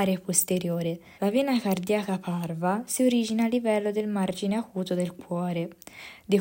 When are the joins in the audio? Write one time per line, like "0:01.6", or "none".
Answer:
0:01.2

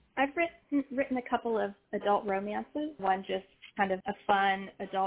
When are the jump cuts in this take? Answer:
0:03.0
0:04.0

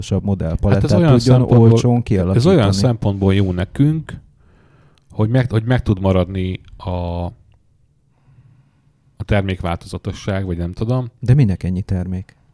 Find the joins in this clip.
none

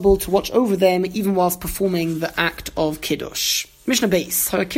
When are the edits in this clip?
none

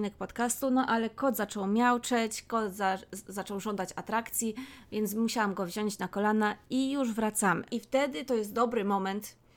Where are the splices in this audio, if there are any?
0:07.7

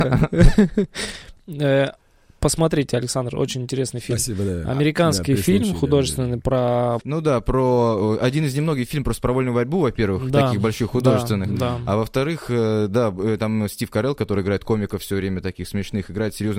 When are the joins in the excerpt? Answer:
0:07.0

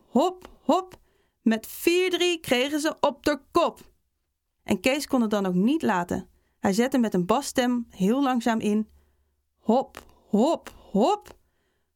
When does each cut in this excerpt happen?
0:04.6

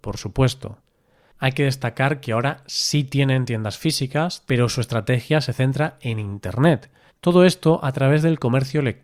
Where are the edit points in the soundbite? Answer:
0:04.5
0:07.1

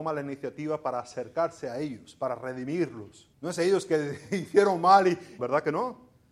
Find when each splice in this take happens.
0:03.3
0:05.4

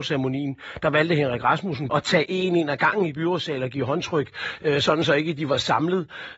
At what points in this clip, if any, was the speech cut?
0:01.9

